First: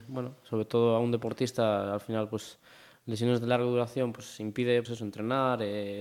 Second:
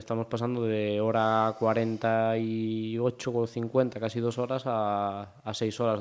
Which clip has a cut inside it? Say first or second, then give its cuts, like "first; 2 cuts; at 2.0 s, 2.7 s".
first; 1 cut; at 4.8 s